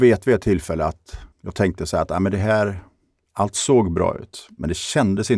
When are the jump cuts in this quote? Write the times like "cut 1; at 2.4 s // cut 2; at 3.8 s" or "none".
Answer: cut 1; at 1.3 s